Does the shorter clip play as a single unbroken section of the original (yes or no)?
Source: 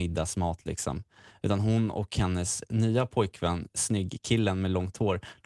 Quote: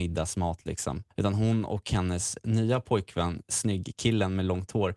no